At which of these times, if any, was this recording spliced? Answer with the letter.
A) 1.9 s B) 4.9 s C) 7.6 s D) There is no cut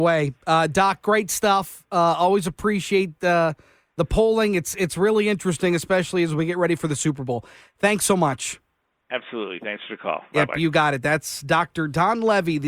D